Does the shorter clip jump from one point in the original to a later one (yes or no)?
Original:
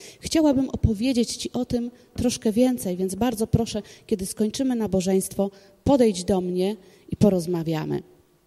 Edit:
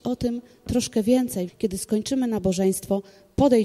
yes